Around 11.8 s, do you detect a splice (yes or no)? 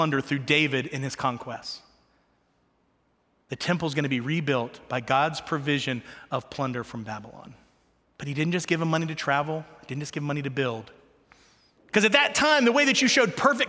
yes